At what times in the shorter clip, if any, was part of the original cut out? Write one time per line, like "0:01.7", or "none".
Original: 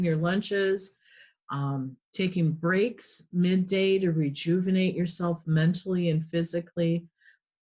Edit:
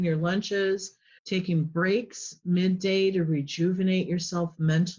0:01.2